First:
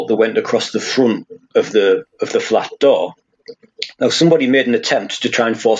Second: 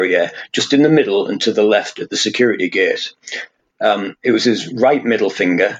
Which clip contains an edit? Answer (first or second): second